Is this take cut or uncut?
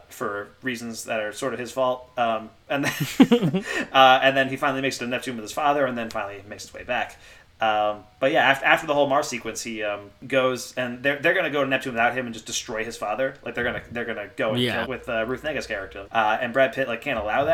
cut